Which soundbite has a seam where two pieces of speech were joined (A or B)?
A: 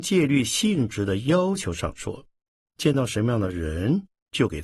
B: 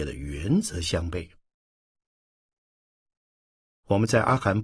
A